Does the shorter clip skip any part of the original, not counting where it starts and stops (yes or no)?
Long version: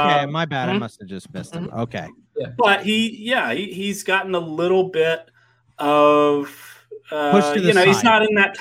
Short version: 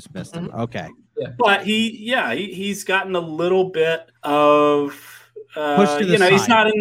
yes